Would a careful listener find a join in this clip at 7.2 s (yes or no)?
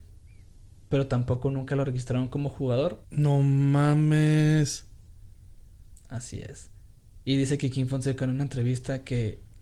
no